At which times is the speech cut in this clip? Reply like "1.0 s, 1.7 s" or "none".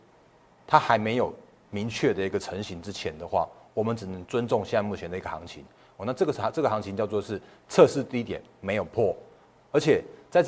none